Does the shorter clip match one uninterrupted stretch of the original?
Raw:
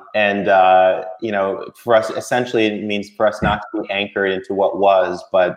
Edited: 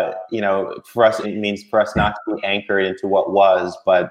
no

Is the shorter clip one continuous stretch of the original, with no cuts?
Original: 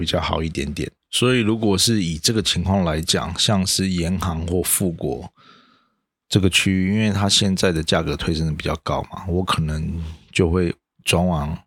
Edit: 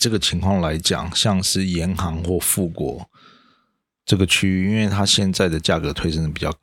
yes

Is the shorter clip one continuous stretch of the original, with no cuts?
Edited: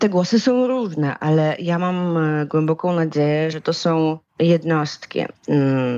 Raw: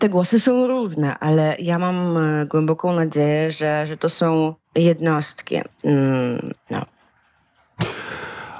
no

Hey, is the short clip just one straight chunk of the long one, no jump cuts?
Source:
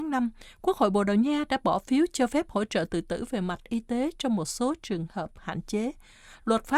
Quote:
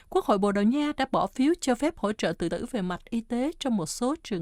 no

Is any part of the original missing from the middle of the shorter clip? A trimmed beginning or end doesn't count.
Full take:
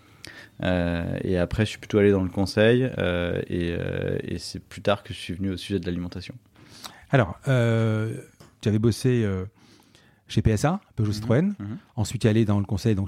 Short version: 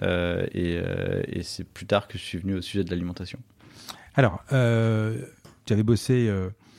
no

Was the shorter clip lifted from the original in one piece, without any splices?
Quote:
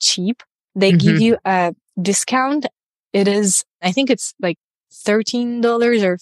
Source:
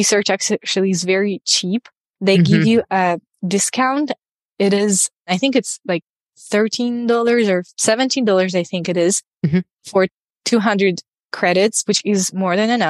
yes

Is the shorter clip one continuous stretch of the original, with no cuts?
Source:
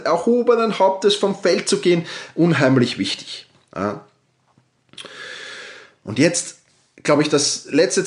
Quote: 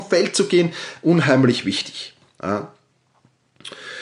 yes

